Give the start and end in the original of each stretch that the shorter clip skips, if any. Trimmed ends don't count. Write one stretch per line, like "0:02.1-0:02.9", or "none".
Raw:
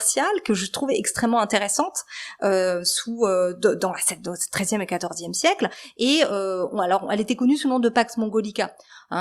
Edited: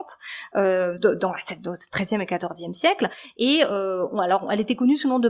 0:02.8-0:03.6